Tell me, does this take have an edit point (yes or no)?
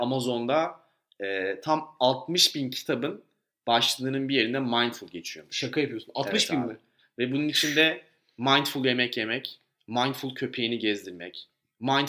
no